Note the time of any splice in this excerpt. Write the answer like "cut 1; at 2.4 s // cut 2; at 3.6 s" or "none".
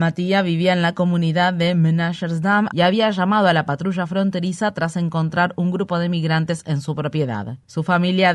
cut 1; at 2.7 s

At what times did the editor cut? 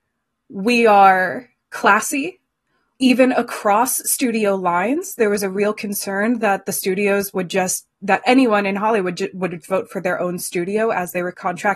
cut 1; at 2.9 s // cut 2; at 9.6 s

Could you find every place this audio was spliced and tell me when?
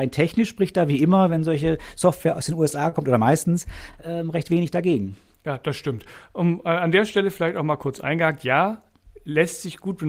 none

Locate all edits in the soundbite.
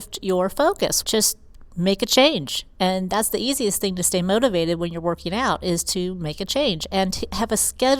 cut 1; at 1.0 s

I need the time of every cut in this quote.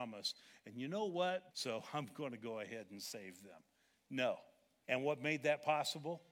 cut 1; at 1.5 s // cut 2; at 4.8 s

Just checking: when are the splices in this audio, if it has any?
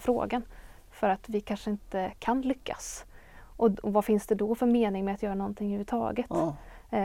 none

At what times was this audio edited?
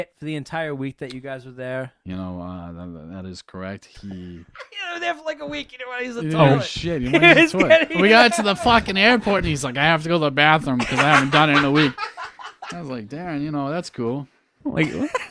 none

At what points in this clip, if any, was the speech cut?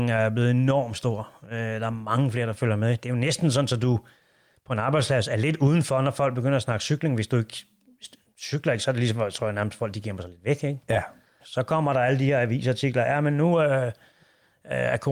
cut 1; at 11.4 s

